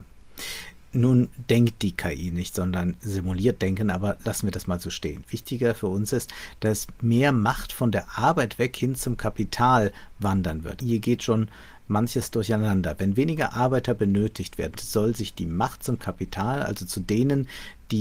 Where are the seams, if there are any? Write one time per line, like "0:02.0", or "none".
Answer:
0:10.8
0:14.7